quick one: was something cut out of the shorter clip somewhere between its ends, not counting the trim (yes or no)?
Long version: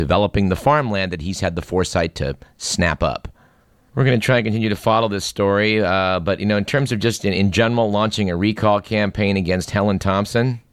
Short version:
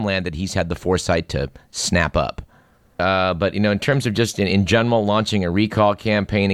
yes